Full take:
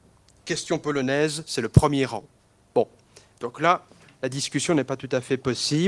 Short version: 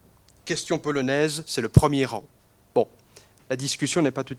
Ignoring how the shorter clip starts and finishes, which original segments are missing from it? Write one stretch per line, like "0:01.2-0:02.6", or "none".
0:03.4-0:04.1